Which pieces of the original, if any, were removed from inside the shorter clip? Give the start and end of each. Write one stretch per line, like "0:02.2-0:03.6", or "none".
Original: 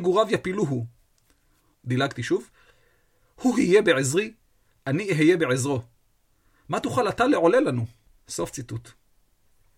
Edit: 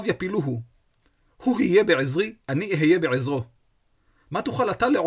0:01.5-0:03.3
0:04.4-0:04.8